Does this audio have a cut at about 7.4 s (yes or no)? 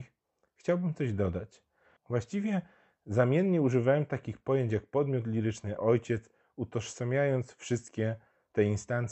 no